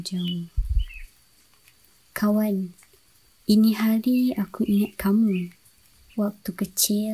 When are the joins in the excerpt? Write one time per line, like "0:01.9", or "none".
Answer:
0:06.1